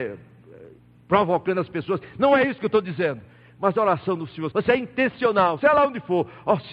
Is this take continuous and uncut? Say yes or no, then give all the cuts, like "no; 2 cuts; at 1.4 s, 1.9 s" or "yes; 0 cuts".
no; 2 cuts; at 4.5 s, 5.6 s